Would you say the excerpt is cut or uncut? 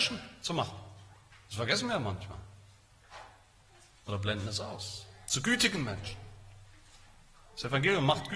uncut